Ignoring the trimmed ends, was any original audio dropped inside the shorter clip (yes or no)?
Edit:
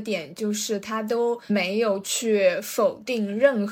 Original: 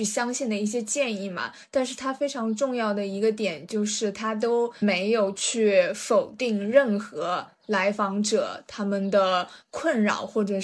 no